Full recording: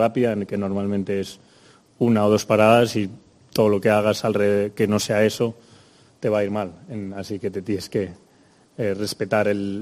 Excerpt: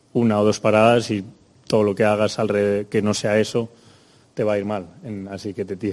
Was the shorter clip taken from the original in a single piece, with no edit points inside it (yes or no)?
yes